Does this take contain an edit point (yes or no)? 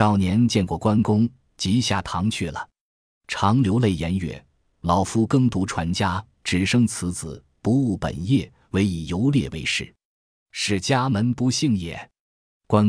no